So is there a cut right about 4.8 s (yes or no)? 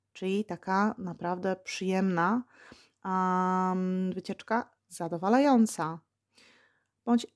yes